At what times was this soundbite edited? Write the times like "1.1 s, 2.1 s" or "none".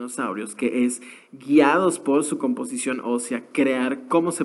none